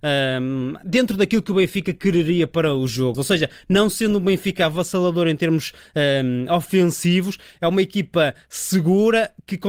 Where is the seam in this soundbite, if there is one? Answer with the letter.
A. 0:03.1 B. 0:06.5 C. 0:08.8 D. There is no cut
A